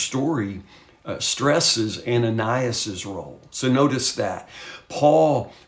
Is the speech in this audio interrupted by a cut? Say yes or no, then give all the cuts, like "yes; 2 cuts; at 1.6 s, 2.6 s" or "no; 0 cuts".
no; 0 cuts